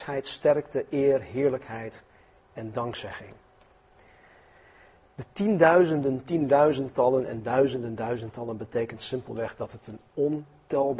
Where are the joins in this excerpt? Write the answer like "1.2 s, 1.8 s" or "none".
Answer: none